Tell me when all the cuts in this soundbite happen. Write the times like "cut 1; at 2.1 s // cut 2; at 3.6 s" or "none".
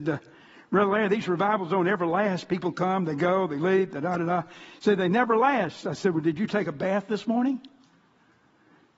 none